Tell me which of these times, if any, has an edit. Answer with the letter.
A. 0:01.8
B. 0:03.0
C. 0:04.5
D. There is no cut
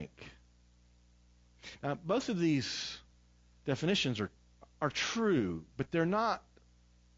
D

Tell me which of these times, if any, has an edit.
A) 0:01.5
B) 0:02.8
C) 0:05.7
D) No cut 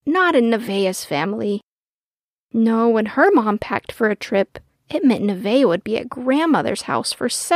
D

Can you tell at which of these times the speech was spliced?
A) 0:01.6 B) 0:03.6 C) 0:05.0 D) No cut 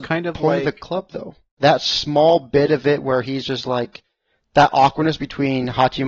A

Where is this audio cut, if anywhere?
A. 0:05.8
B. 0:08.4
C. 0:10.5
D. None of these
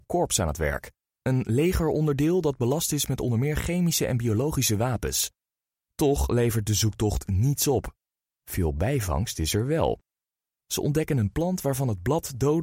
A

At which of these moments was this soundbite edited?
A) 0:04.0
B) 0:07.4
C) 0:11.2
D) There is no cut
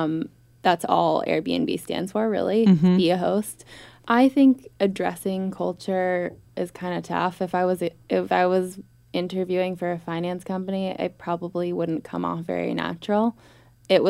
A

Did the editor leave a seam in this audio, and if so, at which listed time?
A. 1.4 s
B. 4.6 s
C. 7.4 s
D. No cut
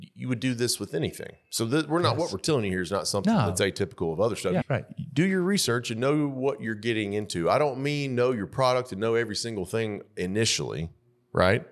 B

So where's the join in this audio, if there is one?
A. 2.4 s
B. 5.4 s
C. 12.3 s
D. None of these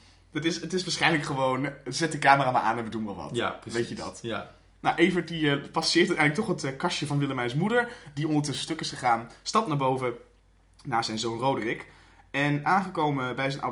D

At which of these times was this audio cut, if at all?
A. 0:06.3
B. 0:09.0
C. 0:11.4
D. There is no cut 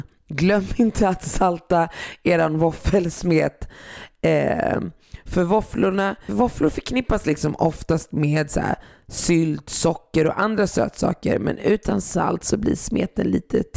A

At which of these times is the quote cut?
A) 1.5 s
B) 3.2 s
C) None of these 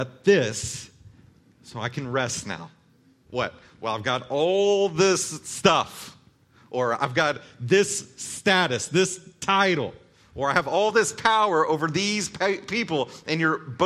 B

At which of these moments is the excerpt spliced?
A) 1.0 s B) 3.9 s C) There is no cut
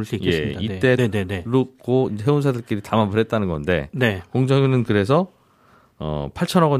A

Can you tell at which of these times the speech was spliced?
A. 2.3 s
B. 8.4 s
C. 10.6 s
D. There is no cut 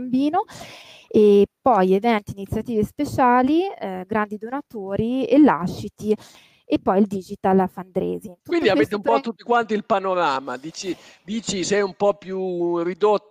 D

